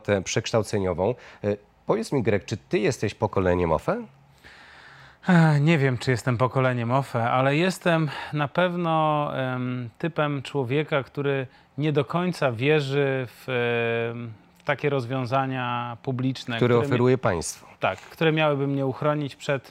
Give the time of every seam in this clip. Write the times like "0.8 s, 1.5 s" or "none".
17.7 s

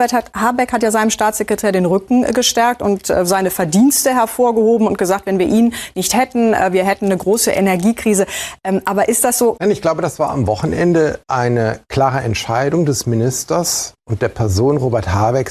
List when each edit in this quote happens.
9.6 s, 11.2 s

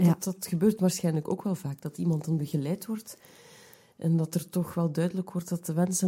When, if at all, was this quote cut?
none

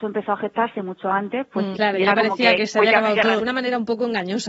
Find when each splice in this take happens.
1.7 s, 3.4 s

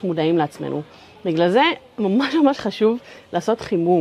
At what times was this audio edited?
none

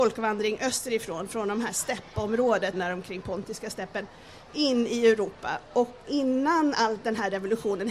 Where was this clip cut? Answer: 2.7 s, 5.7 s

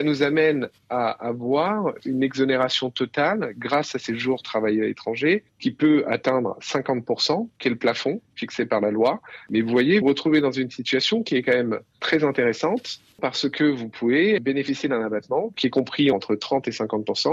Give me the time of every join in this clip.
10.0 s, 16.1 s

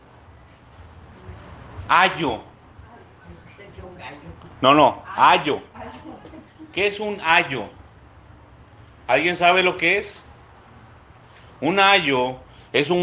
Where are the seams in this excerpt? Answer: none

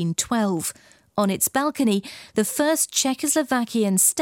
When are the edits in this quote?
none

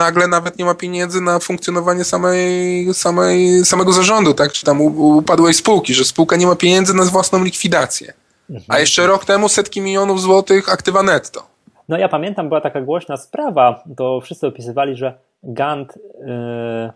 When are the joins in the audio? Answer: none

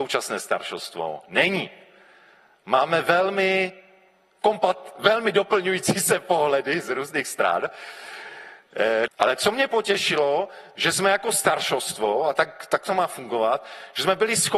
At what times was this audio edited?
9.1 s

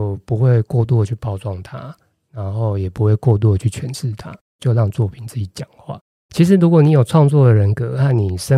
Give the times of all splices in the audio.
6.2 s

